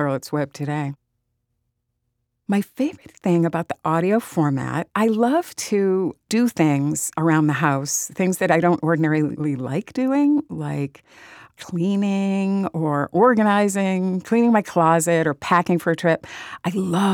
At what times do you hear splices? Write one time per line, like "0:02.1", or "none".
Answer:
0:04.9